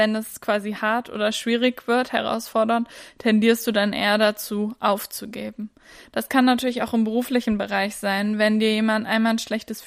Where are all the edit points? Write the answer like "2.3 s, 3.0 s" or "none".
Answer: none